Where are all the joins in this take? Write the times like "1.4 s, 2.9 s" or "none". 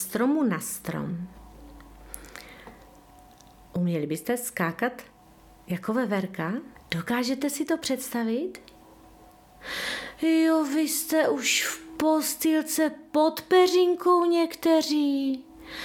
6.8 s